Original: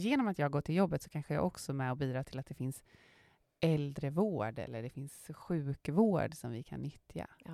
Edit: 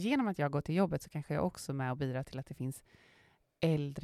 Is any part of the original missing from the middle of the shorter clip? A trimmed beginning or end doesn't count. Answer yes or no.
no